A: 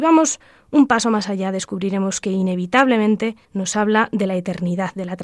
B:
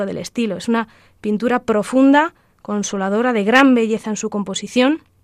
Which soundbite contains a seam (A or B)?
A